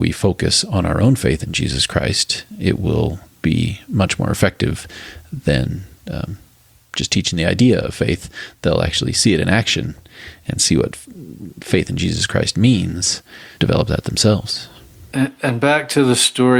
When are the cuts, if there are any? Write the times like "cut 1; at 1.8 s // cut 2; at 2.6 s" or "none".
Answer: cut 1; at 13.6 s